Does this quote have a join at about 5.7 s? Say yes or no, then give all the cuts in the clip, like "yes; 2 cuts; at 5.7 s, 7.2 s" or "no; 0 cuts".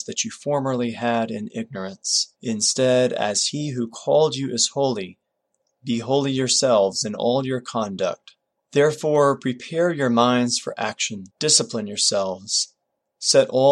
no; 3 cuts; at 2.4 s, 8.5 s, 11.3 s